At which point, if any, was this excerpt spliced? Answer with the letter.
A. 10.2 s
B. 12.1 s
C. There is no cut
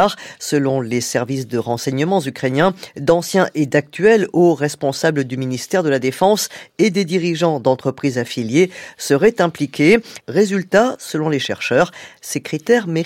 A